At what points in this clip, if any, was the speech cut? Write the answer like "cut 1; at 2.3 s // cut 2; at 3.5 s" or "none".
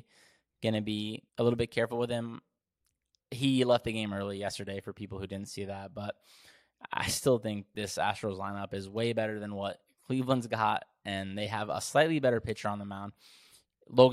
cut 1; at 1.3 s